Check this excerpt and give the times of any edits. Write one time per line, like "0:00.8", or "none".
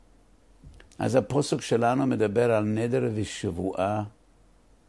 0:00.9